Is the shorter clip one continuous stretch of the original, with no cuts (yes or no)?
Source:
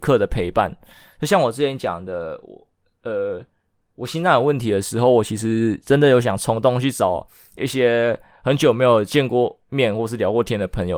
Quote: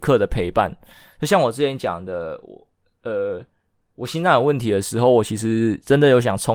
yes